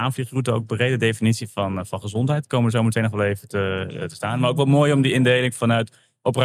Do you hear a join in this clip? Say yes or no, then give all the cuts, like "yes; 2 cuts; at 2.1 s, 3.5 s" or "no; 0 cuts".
no; 0 cuts